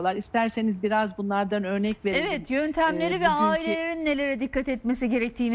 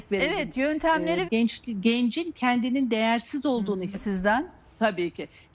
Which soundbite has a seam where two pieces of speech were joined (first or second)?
second